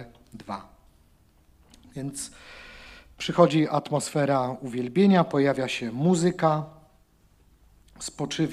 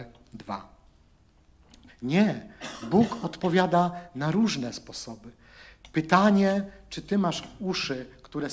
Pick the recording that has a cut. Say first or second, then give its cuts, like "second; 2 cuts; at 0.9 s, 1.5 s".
second; 1 cut; at 1.9 s